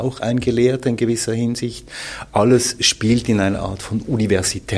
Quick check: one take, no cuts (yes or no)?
yes